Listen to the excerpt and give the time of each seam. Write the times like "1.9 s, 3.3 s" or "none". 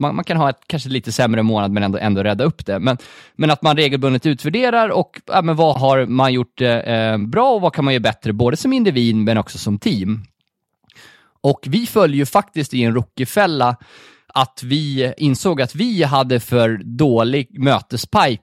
5.7 s, 15.2 s